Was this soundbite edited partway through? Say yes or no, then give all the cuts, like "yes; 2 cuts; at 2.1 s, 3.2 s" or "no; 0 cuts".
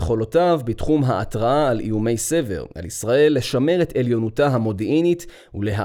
yes; 1 cut; at 2.7 s